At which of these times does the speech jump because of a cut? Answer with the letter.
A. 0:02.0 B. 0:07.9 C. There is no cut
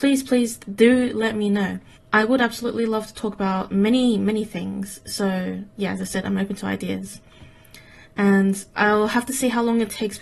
A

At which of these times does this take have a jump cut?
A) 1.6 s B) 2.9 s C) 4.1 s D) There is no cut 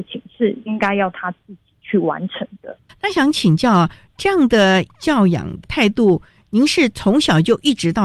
B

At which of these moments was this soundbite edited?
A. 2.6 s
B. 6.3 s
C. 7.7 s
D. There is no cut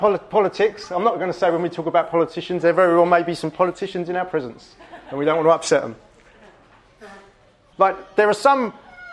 C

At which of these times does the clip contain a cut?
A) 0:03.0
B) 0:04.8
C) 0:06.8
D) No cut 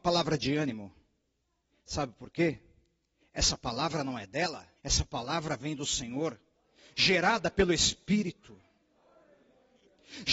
B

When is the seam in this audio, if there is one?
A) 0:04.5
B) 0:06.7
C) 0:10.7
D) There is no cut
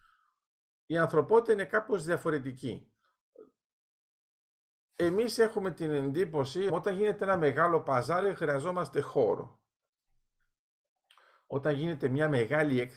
B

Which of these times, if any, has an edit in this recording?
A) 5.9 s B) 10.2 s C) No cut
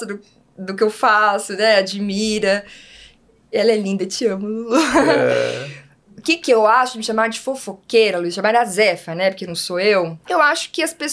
B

